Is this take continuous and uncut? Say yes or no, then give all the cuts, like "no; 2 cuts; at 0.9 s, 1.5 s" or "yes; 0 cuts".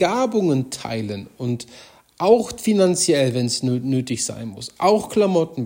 yes; 0 cuts